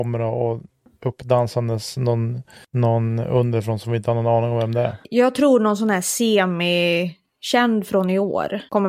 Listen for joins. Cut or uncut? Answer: uncut